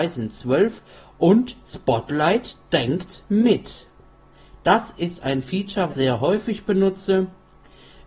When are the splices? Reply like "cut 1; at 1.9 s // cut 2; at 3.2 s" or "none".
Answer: cut 1; at 5.9 s